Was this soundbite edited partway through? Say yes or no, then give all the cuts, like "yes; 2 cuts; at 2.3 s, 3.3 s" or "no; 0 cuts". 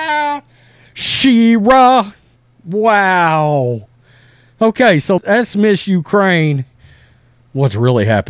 yes; 1 cut; at 5.2 s